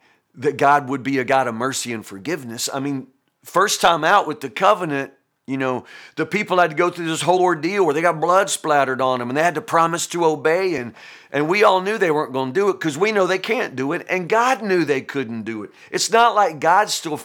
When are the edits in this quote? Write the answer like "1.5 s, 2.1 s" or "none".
none